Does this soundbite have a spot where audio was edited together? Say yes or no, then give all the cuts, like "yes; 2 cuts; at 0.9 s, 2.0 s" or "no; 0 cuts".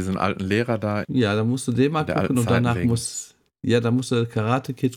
yes; 1 cut; at 1.0 s